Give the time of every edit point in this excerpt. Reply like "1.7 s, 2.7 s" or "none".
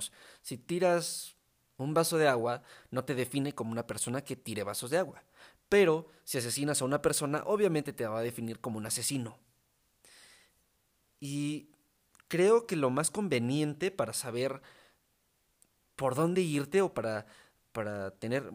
none